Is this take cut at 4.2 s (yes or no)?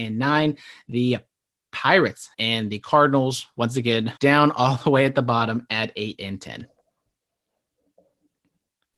yes